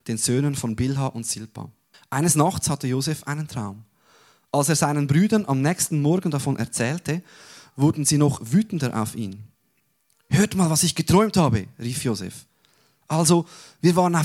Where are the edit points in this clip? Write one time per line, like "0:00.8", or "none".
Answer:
0:01.9

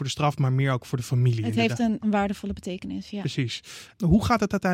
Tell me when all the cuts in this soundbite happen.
0:02.0

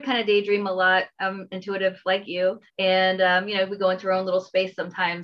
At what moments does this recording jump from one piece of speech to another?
0:02.7

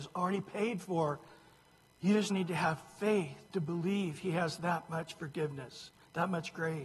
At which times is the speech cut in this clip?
0:02.3
0:03.5

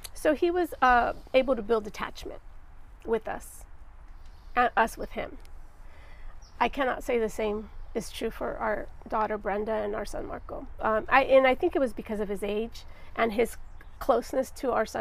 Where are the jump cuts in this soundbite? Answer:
0:10.8
0:14.0

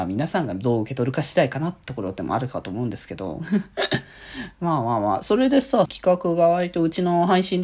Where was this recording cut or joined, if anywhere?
0:05.8

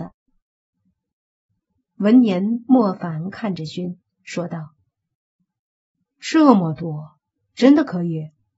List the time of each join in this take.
0:03.7

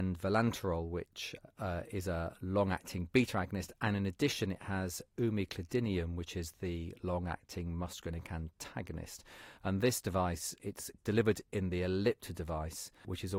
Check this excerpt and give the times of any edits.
none

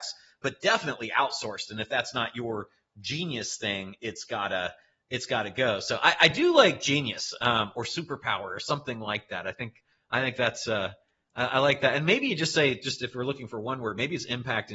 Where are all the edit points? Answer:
none

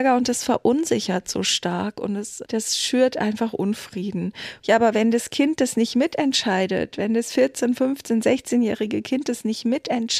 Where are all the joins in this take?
0:02.4
0:04.6

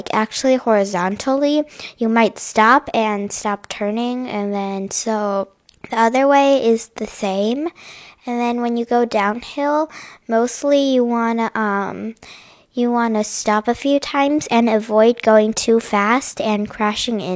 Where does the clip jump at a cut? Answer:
none

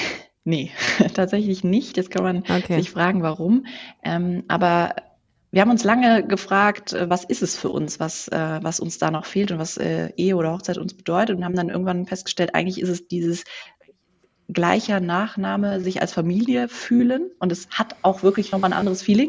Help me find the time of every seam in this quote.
none

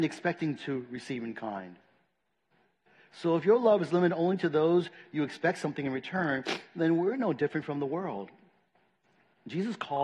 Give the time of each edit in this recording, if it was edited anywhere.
none

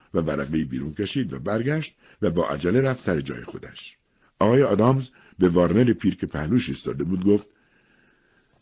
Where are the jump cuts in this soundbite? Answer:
0:04.2

